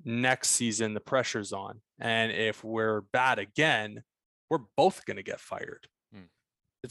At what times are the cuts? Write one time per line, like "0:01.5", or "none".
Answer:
none